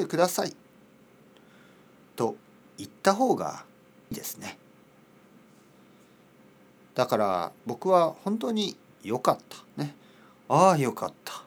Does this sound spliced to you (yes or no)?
yes